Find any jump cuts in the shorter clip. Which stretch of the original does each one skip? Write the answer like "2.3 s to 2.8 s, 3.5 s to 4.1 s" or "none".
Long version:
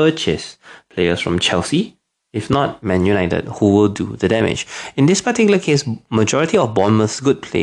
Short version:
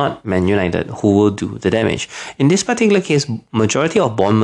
none